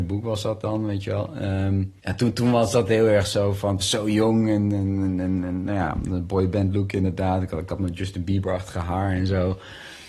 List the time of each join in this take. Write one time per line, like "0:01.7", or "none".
0:02.0
0:03.8